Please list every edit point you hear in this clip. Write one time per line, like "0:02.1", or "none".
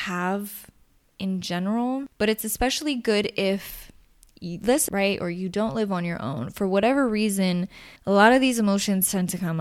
0:04.9
0:08.0